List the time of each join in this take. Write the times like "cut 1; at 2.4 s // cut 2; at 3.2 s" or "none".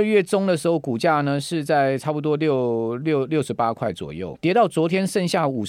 cut 1; at 4.4 s